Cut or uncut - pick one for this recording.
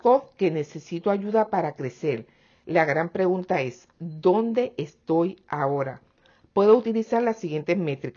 uncut